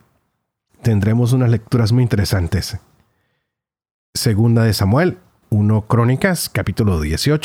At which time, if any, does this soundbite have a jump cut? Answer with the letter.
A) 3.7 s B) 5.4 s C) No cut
B